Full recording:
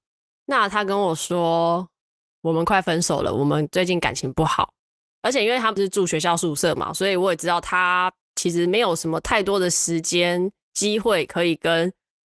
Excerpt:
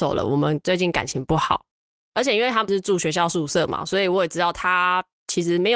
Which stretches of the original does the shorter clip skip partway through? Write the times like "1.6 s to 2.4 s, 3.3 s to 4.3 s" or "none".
none